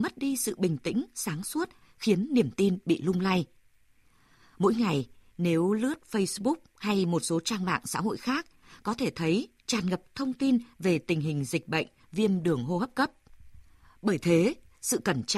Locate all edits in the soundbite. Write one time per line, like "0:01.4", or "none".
none